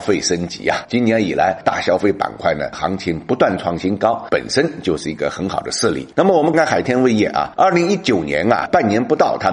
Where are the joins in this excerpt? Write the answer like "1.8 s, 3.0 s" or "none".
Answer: 6.5 s

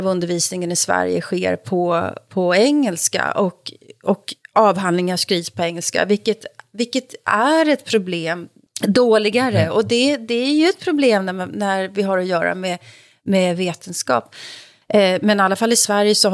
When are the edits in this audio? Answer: 8.7 s, 14.8 s

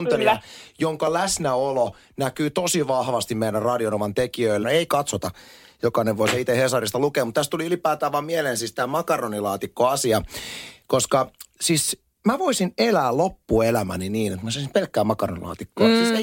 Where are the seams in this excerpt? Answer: 4.6 s

